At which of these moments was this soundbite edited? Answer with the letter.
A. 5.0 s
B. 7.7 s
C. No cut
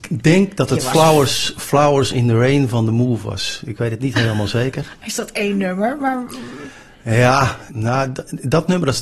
B